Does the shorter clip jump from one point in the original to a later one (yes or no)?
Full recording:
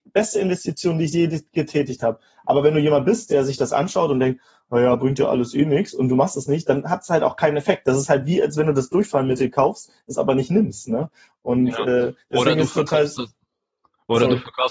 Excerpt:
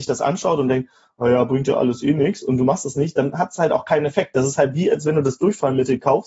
no